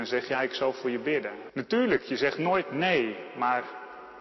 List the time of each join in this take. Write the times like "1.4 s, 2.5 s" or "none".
1.5 s